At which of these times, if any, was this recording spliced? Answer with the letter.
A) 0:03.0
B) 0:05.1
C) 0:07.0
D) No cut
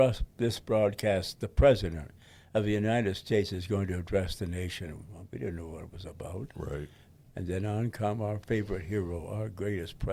D